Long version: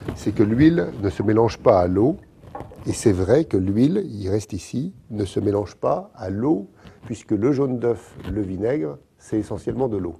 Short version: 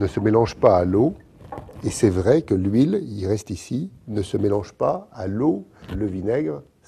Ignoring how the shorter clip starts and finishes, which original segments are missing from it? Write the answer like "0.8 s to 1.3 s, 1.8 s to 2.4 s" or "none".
6.9 s to 8.2 s